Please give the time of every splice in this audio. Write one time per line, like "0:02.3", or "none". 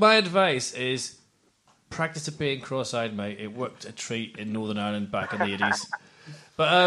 none

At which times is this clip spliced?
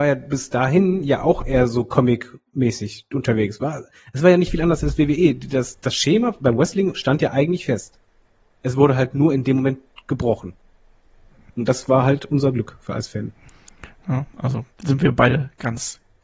none

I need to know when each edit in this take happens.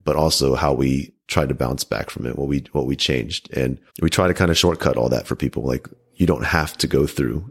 0:03.9

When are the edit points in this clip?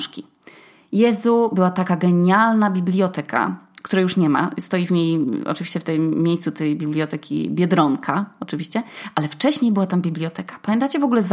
none

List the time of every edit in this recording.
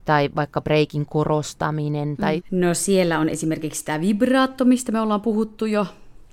0:02.4

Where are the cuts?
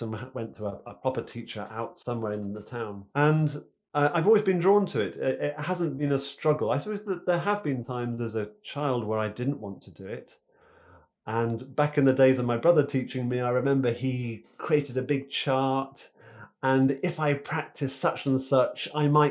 0:03.1

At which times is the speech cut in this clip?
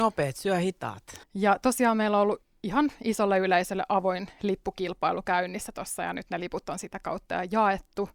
0:01.2

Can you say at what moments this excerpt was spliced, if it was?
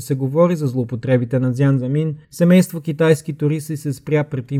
0:02.2

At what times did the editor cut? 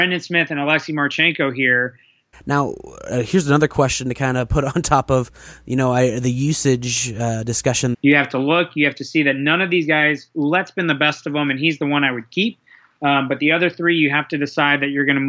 0:02.3
0:07.9

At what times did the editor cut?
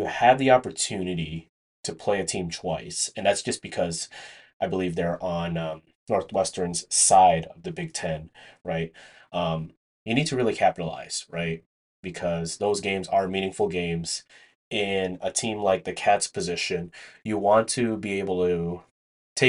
none

